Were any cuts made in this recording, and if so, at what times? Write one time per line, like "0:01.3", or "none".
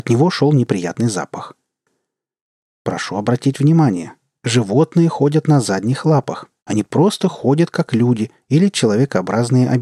0:06.6